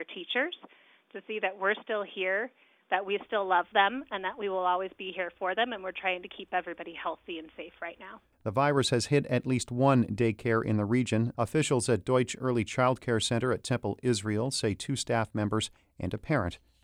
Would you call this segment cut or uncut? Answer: cut